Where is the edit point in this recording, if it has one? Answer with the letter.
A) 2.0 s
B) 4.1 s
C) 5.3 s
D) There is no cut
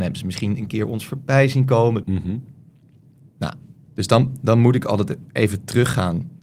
A